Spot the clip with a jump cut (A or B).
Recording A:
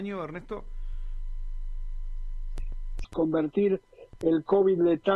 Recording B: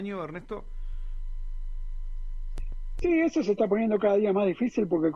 A